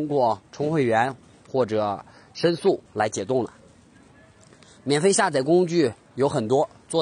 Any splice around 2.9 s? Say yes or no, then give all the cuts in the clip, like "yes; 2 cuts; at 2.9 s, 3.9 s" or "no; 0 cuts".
yes; 1 cut; at 2.9 s